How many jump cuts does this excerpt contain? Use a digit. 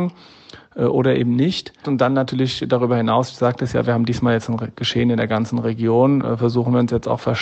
1